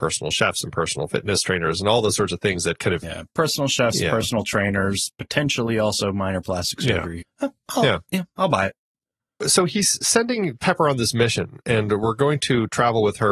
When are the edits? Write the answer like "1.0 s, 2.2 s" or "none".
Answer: 7.2 s